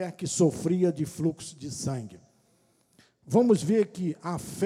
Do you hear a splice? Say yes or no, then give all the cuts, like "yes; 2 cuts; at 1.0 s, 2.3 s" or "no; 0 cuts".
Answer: no; 0 cuts